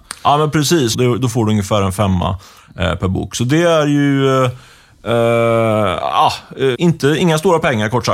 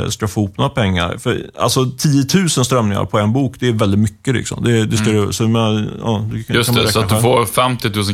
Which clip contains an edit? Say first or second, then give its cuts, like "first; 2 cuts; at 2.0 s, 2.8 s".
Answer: first; 2 cuts; at 0.9 s, 6.7 s